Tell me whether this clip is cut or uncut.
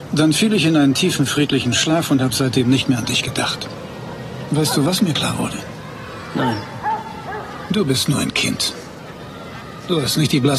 uncut